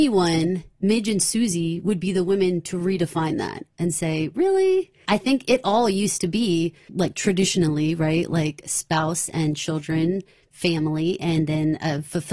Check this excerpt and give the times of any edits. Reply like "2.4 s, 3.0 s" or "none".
5.0 s